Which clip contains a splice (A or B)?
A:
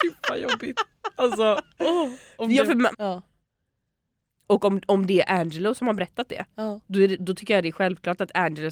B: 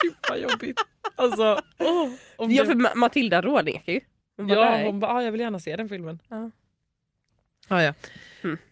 A